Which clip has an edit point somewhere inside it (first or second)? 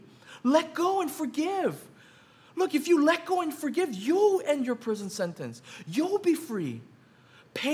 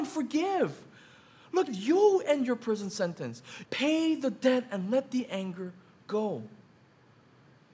second